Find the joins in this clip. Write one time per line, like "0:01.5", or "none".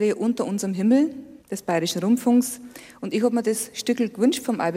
0:01.4